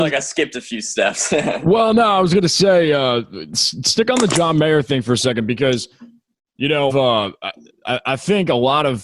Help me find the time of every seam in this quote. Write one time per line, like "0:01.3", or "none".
0:06.9